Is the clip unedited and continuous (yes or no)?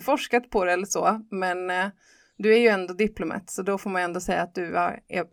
yes